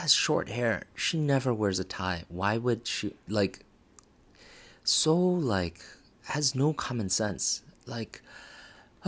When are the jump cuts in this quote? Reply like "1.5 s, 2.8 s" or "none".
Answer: none